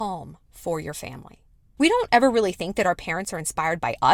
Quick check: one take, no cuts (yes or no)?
no